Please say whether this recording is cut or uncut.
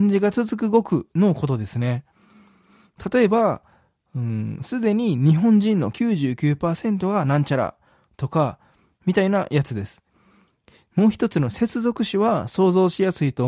cut